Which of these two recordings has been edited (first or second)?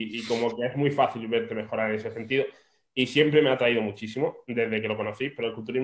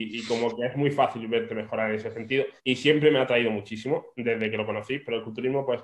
second